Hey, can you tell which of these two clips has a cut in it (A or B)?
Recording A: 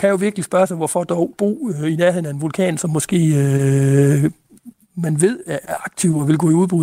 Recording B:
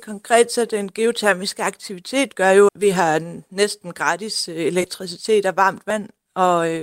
B